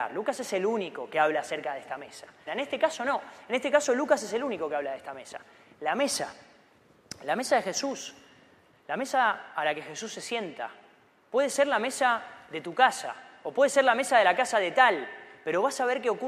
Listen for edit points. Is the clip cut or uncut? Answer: cut